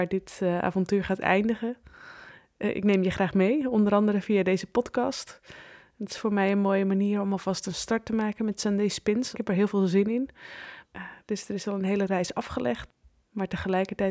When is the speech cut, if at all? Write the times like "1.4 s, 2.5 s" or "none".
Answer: 9.3 s, 10.8 s